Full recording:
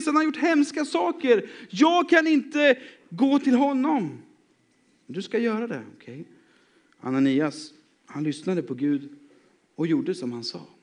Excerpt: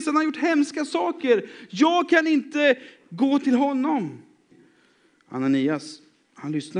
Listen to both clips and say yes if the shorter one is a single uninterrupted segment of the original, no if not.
no